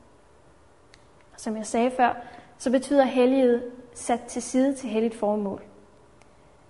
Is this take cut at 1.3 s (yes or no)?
yes